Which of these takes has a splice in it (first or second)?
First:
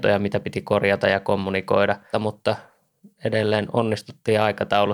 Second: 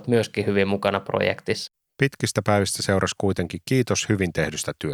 first